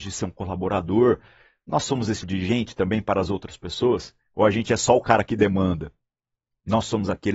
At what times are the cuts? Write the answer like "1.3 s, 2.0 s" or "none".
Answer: 2.2 s